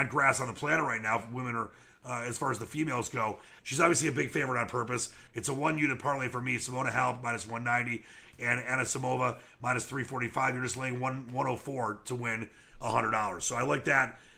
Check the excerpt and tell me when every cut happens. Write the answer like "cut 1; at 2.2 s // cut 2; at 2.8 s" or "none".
cut 1; at 3.6 s // cut 2; at 5.3 s